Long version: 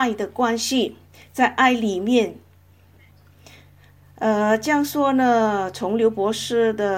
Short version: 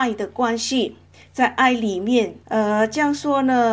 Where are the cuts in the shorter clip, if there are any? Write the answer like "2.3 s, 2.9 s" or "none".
2.4 s